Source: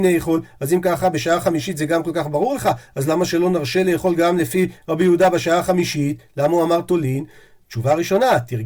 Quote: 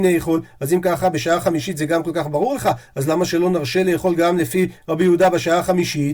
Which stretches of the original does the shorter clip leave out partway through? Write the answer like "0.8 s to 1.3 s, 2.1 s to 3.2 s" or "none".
none